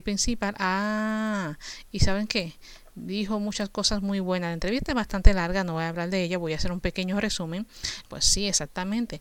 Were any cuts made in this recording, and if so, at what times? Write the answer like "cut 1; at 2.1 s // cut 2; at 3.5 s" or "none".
cut 1; at 8.1 s

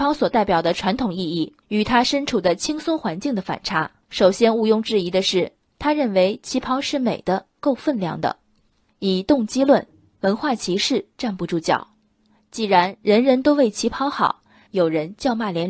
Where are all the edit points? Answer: cut 1; at 4.0 s // cut 2; at 14.7 s

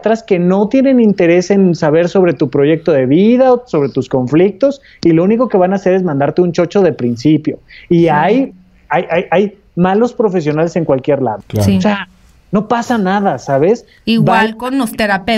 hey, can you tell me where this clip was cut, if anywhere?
cut 1; at 11.4 s

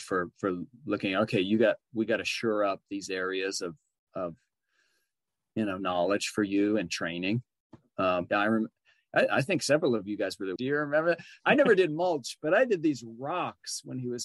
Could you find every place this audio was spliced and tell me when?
cut 1; at 8.3 s // cut 2; at 10.6 s

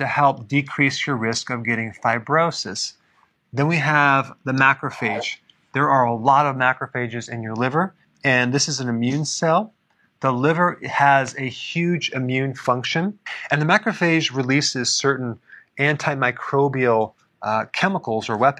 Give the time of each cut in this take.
cut 1; at 3.4 s

